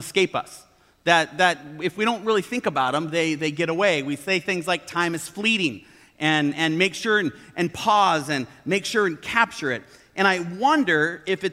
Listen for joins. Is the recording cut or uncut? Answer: uncut